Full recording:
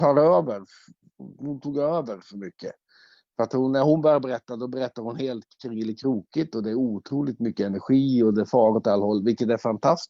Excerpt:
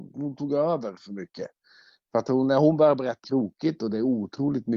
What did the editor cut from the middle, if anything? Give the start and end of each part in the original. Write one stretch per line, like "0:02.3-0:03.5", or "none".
0:04.5-0:06.0